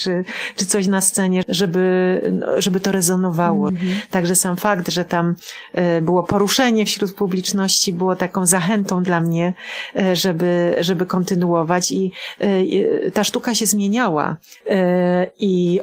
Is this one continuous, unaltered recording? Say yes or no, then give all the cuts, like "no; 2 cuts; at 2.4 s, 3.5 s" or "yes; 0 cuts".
no; 3 cuts; at 1.4 s, 3.7 s, 14.6 s